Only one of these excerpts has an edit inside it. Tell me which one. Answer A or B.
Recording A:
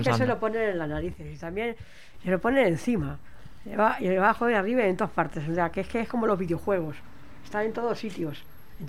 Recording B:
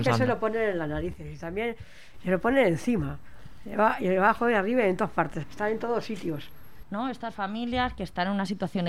B